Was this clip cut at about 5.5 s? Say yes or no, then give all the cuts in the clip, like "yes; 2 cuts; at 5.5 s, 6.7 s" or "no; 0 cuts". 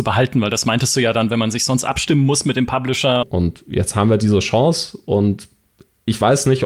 no; 1 cut; at 3.2 s